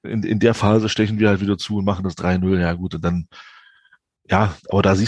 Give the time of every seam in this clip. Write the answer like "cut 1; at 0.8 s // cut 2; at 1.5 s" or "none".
none